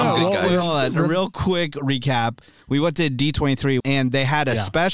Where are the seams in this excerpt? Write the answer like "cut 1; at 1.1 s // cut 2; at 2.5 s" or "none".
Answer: cut 1; at 3.8 s